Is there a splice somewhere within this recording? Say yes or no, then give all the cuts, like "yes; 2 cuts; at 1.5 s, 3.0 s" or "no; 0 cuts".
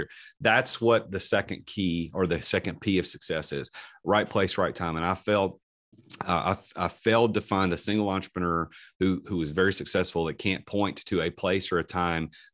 no; 0 cuts